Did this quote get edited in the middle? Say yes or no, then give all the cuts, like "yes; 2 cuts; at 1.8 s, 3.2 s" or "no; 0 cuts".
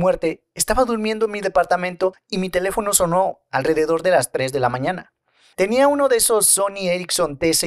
no; 0 cuts